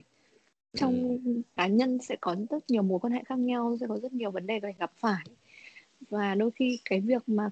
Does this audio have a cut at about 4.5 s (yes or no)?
no